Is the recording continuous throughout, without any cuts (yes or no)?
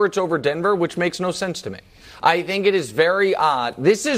yes